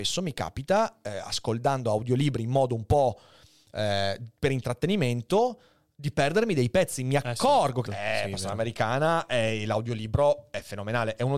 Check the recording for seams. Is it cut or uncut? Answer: cut